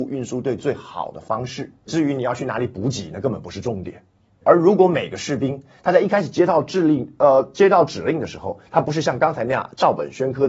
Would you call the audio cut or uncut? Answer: cut